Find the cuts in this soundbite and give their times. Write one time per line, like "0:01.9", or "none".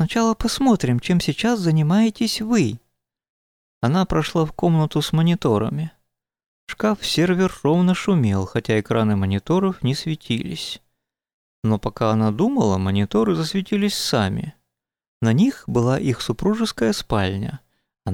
0:11.5